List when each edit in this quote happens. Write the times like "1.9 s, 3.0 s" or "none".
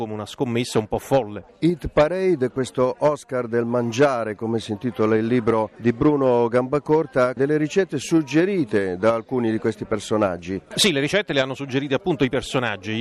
7.4 s

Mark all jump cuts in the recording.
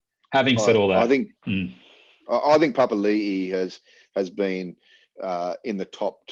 1.4 s

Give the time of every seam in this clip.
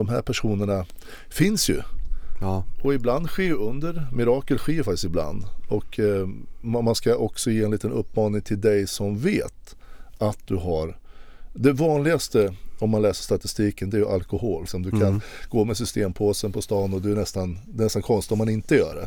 14.7 s

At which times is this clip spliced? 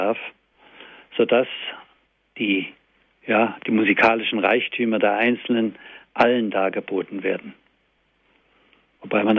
none

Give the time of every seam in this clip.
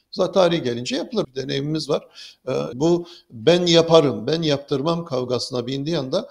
1.2 s, 2.7 s

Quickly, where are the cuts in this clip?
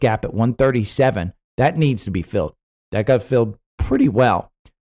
2.8 s

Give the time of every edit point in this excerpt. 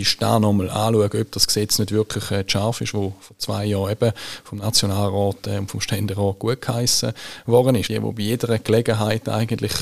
7.8 s

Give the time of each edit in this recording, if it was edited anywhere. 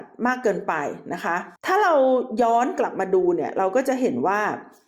1.6 s

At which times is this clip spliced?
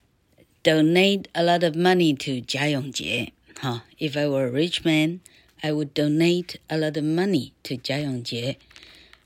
none

